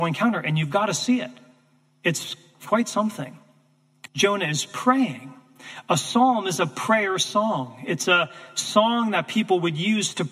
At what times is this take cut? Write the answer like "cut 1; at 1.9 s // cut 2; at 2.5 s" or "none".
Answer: cut 1; at 4.1 s